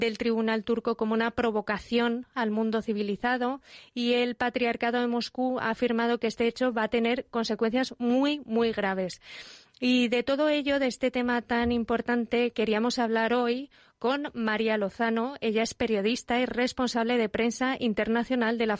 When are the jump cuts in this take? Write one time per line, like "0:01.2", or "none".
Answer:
none